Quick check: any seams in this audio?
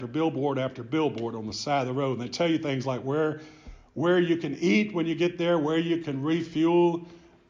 no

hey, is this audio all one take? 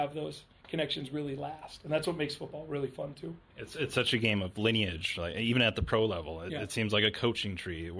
yes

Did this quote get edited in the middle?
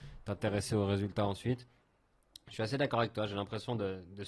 no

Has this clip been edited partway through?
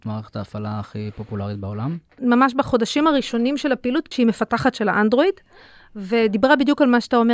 yes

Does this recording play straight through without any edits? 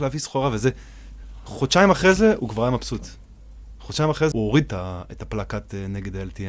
no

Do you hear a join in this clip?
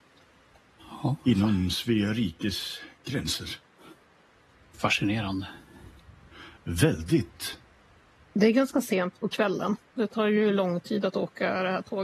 no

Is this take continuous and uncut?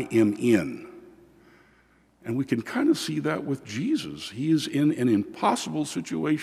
yes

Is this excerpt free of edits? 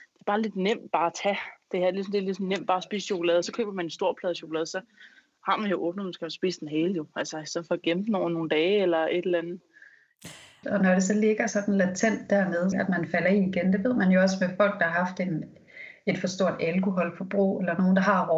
no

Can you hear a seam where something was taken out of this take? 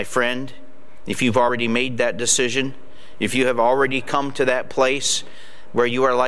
no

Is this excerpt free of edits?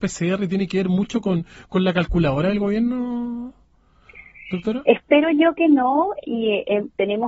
yes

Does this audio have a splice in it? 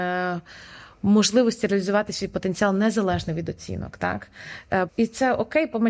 yes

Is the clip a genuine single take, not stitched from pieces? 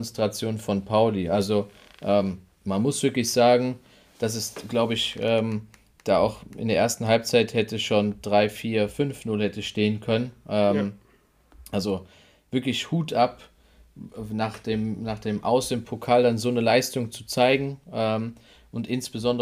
yes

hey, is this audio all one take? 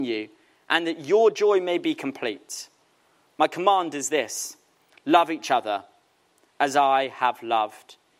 yes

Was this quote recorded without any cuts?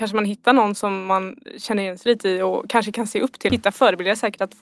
no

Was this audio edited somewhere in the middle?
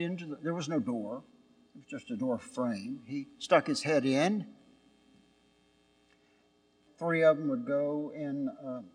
yes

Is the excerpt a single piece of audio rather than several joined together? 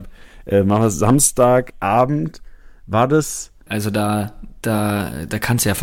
no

